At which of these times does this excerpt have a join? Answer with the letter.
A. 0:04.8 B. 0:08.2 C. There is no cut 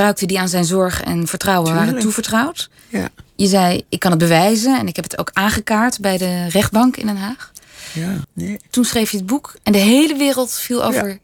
B